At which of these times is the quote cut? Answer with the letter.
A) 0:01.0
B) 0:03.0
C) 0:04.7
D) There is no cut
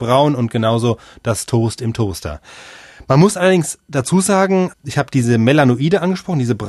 C